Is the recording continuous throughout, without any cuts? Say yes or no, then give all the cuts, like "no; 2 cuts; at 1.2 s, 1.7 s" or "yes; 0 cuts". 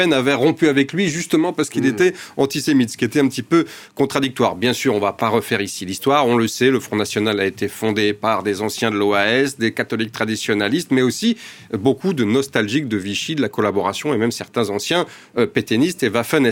yes; 0 cuts